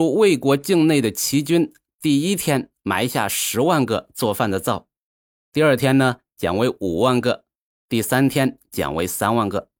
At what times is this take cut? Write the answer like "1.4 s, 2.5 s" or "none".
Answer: none